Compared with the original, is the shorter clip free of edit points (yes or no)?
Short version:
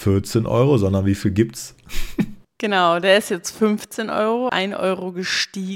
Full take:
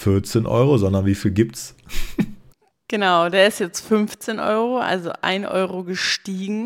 no